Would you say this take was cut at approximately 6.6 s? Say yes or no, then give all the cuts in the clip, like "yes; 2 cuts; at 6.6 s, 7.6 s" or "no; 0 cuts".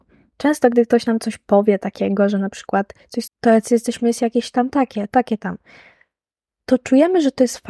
no; 2 cuts; at 3.3 s, 5.1 s